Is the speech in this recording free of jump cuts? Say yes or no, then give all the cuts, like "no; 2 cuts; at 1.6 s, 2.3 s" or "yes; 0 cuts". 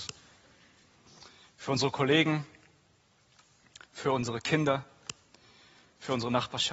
yes; 0 cuts